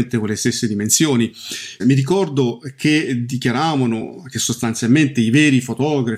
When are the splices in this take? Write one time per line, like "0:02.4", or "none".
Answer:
0:01.8

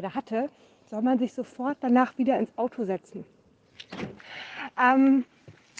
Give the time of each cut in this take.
0:04.2

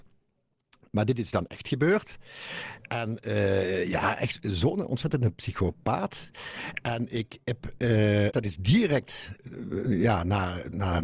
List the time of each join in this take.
0:08.3

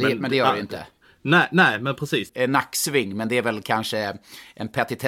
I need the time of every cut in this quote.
0:02.3

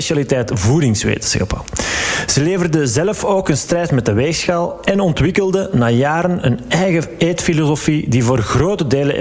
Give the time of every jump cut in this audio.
none

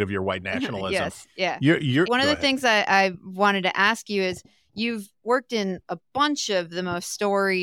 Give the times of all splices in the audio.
0:02.1

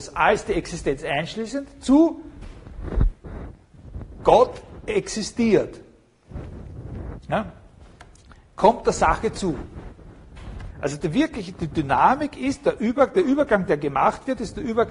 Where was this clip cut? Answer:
0:10.7

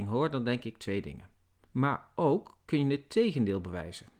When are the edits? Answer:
0:01.6

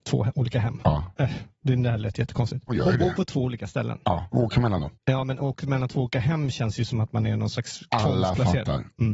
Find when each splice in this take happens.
0:02.7

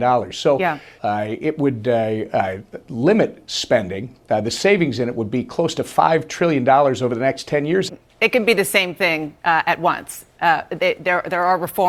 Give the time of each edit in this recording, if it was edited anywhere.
0:01.0
0:07.9

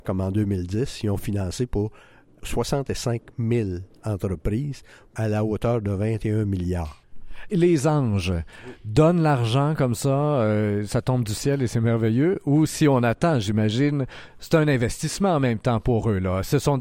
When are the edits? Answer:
none

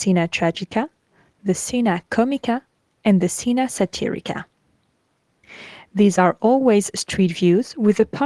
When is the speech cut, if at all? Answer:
none

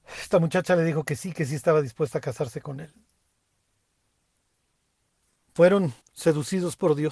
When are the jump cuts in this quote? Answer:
0:06.0

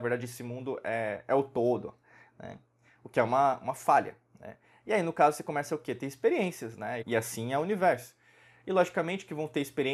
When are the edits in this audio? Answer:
0:07.0

